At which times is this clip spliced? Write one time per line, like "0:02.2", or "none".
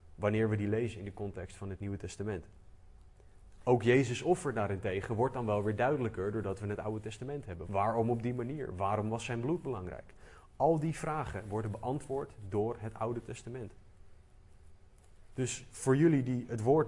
0:07.6